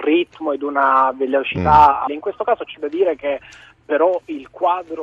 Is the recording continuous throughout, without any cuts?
no; 1 cut; at 2.1 s

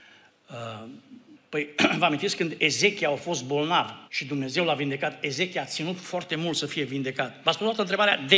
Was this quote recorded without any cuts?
no; 2 cuts; at 1.4 s, 4.1 s

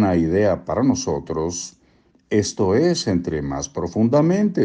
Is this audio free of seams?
yes; 0 cuts

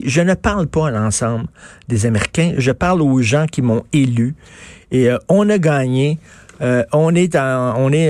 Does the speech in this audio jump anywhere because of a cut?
yes; 1 cut; at 2.5 s

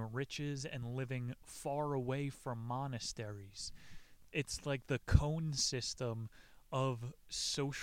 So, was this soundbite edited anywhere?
yes; 1 cut; at 4.3 s

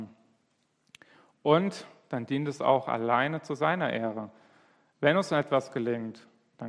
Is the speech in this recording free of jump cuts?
yes; 0 cuts

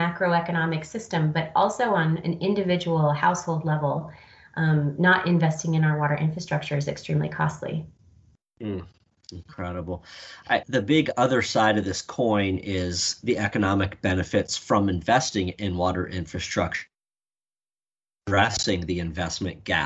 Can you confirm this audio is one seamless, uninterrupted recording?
no; 1 cut; at 10.6 s

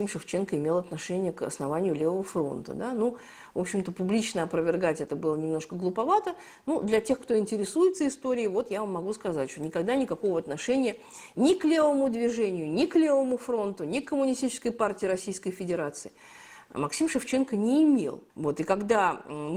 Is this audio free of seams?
no; 1 cut; at 18.3 s

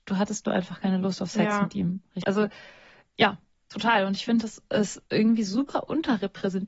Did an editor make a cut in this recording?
yes; 1 cut; at 2.2 s

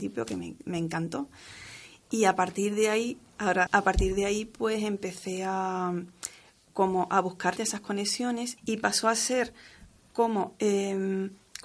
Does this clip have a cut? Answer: yes; 3 cuts; at 3.7 s, 7.6 s, 8.6 s

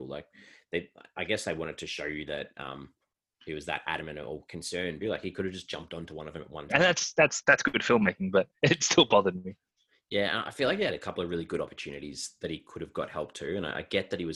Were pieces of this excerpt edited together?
yes; 2 cuts; at 5.0 s, 6.7 s

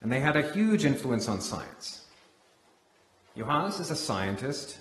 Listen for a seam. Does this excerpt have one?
yes; 1 cut; at 3.3 s

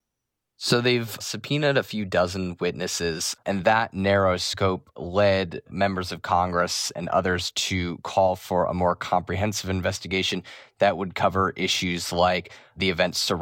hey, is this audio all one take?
no; 2 cuts; at 1.2 s, 3.4 s

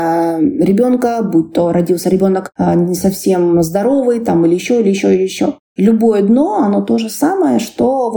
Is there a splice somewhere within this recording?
no; 0 cuts

